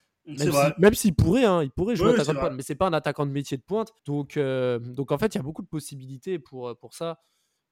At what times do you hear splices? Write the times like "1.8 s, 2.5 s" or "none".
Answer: 4.0 s